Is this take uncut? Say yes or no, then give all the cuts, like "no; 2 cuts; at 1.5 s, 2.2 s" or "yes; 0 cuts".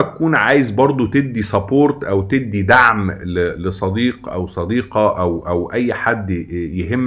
yes; 0 cuts